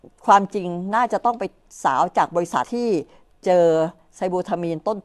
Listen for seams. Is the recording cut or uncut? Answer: cut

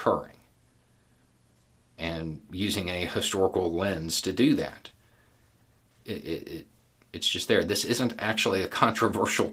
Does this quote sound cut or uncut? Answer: cut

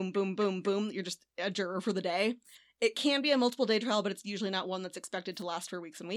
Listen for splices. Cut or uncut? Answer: uncut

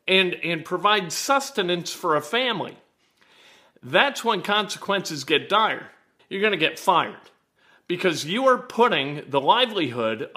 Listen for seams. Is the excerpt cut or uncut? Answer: cut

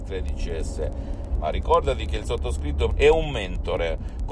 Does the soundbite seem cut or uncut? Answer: cut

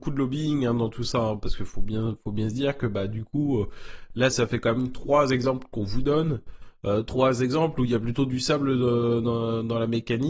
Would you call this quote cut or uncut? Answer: cut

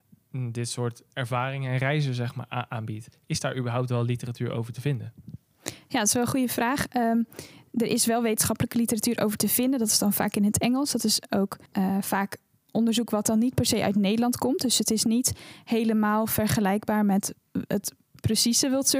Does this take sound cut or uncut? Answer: cut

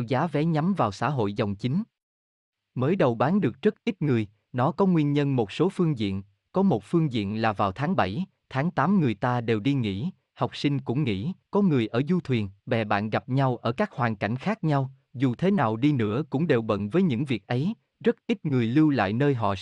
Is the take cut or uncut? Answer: cut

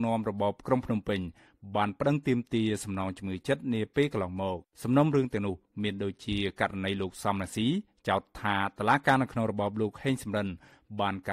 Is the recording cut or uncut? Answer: cut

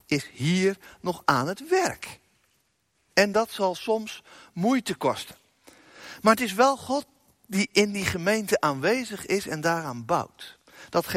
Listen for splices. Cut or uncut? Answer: cut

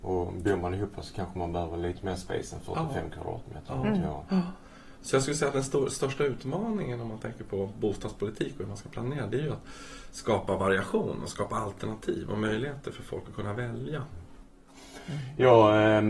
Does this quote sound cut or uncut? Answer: uncut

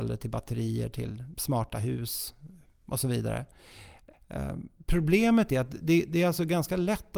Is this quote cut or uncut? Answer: cut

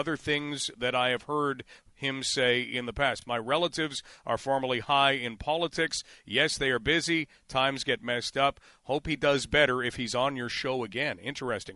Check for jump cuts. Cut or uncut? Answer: uncut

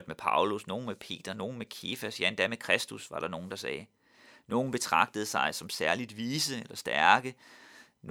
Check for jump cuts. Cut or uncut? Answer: uncut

